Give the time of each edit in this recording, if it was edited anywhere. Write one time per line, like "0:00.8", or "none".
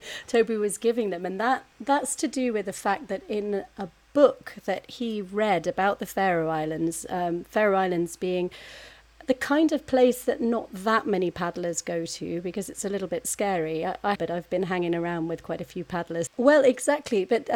0:14.2
0:16.3